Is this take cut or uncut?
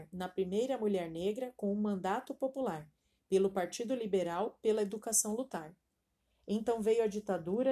uncut